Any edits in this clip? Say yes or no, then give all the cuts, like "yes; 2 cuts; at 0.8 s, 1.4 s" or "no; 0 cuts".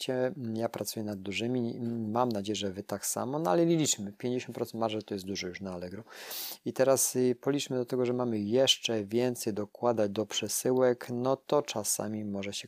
no; 0 cuts